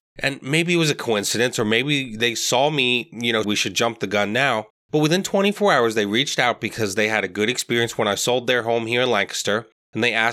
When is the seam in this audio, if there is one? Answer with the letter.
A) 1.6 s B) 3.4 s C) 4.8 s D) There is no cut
B